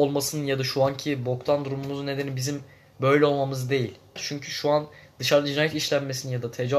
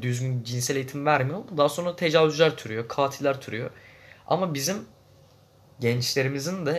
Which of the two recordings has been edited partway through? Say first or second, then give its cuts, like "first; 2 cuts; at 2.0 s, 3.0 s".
first; 1 cut; at 4.2 s